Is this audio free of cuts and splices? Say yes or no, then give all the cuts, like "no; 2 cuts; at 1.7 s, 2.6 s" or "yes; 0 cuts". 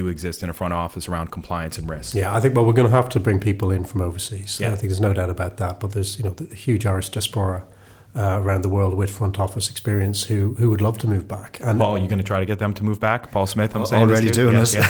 yes; 0 cuts